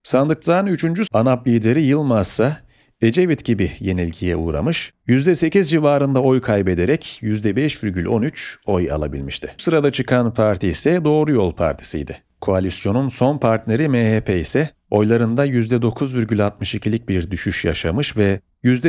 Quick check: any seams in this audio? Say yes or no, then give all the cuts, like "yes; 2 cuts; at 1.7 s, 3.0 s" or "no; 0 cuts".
yes; 3 cuts; at 1.1 s, 9.6 s, 12.3 s